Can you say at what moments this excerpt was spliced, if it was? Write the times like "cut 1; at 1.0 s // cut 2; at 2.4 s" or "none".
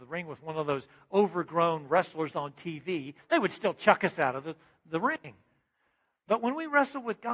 cut 1; at 3.2 s